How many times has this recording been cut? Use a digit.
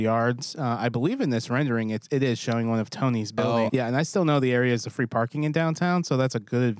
1